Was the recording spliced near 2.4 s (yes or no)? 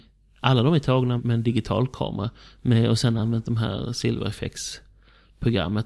no